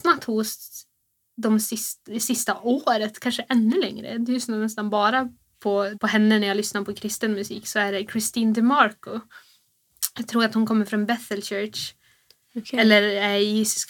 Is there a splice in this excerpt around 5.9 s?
yes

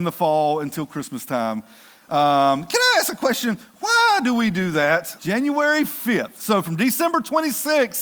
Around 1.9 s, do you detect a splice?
no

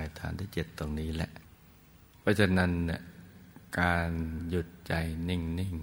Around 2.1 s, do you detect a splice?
yes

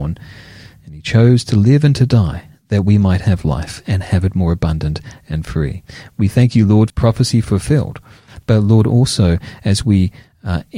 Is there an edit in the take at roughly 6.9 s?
yes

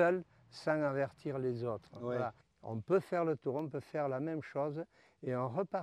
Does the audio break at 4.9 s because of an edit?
no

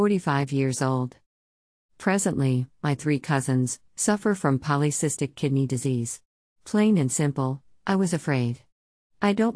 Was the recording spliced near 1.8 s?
no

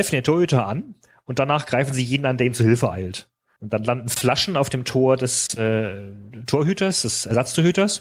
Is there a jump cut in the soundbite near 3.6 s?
yes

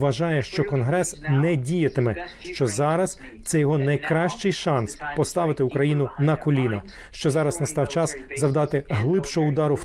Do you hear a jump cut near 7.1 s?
no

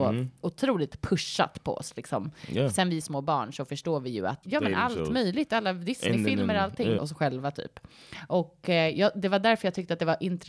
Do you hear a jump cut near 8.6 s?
no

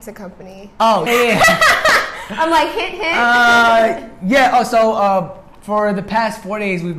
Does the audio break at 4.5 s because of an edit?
no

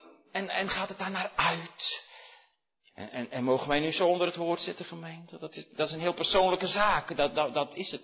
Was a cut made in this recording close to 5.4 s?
no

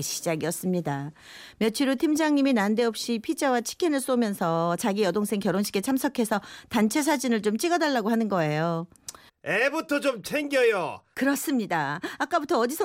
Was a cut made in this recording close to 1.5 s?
no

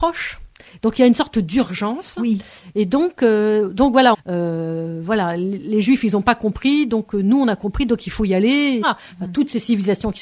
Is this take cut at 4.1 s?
yes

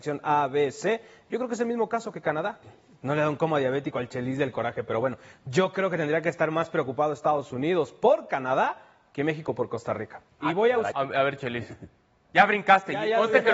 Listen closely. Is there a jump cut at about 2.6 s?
yes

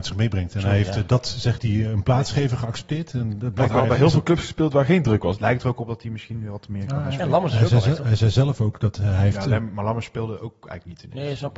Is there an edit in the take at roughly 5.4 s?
yes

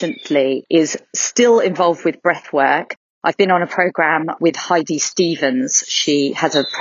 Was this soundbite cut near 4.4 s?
yes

